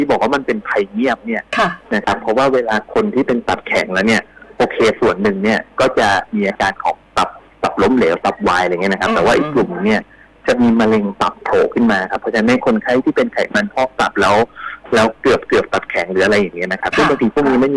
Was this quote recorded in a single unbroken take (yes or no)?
yes